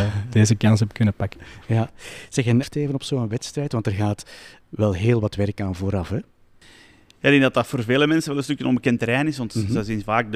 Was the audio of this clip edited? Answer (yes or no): yes